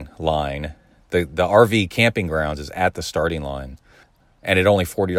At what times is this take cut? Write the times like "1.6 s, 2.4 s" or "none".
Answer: none

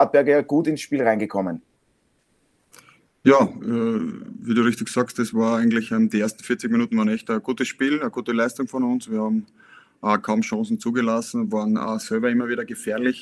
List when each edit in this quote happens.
none

